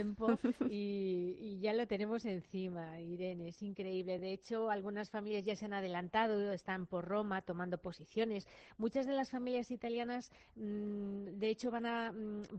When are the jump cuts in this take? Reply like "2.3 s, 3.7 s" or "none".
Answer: none